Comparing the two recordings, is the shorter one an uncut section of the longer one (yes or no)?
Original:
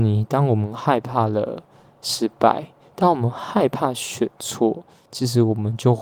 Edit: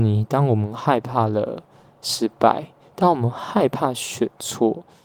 yes